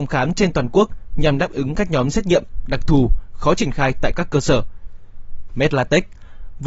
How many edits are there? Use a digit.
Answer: 1